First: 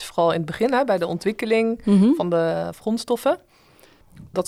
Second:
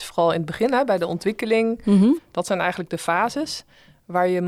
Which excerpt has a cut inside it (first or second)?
second